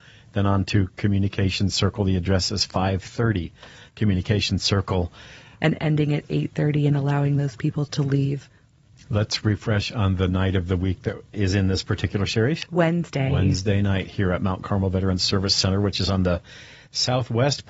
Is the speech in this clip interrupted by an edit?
yes; 2 cuts; at 5.6 s, 11.3 s

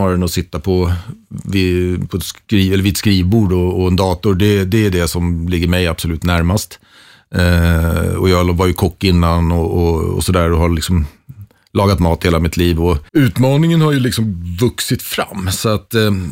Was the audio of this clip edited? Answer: yes; 1 cut; at 13.1 s

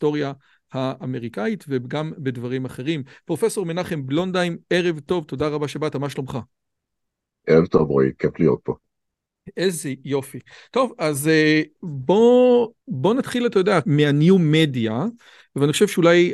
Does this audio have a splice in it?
yes; 2 cuts; at 12.8 s, 13.8 s

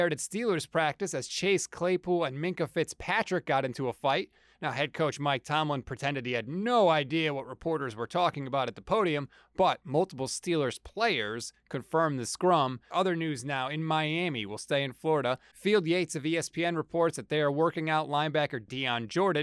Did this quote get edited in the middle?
yes; 2 cuts; at 12.9 s, 15.5 s

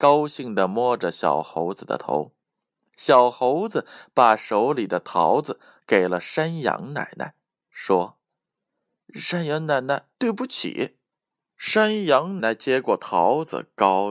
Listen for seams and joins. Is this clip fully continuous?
no; 2 cuts; at 10.1 s, 12.4 s

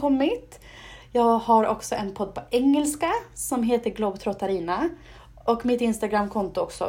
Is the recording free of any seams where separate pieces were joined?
yes; 0 cuts

